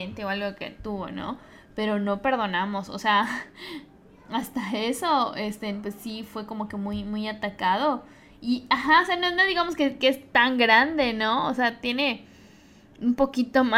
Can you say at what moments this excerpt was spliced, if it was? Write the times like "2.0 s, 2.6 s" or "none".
none